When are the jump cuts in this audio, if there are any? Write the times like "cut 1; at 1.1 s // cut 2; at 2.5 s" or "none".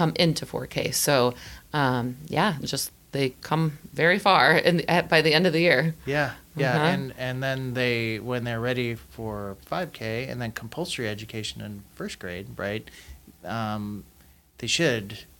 none